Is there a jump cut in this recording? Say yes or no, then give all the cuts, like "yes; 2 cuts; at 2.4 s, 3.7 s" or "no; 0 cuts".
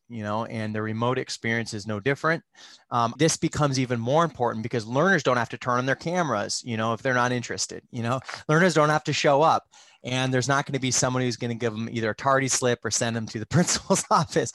yes; 1 cut; at 3.2 s